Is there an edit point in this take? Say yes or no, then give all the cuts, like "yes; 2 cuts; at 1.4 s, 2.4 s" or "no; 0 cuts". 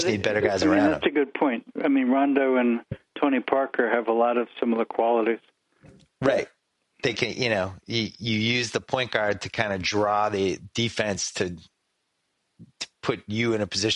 no; 0 cuts